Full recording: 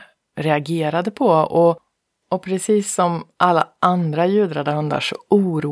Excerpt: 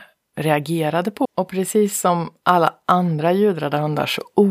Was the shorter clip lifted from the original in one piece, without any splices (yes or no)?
no